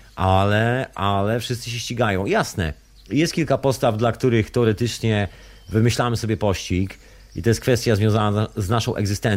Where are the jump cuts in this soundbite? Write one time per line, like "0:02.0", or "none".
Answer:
none